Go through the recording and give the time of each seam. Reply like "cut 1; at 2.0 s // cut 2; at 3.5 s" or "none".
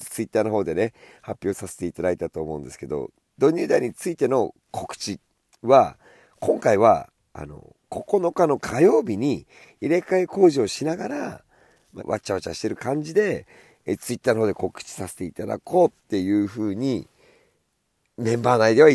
cut 1; at 12.0 s